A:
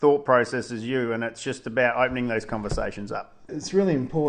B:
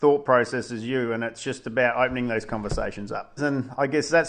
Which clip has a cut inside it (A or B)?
B